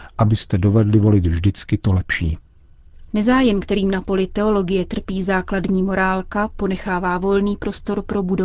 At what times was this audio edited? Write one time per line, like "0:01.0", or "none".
0:03.1